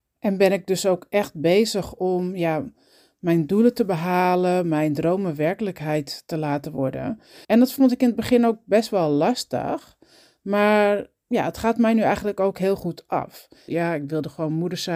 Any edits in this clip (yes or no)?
yes